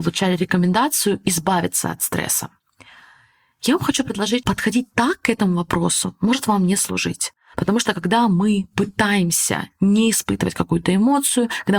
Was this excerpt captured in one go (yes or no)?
yes